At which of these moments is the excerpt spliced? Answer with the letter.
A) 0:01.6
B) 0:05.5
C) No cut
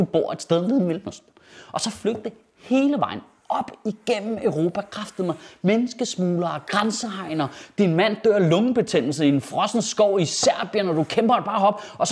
C